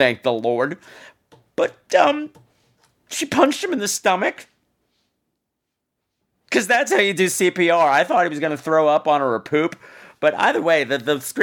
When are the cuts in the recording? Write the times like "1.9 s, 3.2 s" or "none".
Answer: none